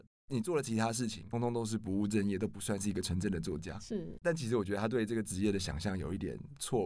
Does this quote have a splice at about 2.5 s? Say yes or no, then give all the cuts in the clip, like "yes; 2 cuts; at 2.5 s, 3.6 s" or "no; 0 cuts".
no; 2 cuts; at 1.3 s, 4.2 s